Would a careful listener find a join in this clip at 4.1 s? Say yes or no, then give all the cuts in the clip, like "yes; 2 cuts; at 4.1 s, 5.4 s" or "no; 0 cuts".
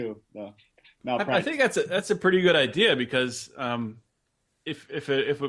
no; 0 cuts